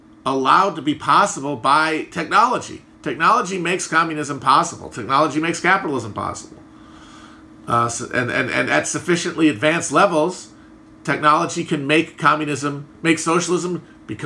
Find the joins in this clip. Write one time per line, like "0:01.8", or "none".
none